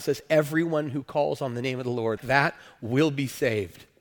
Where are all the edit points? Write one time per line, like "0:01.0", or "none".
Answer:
0:02.2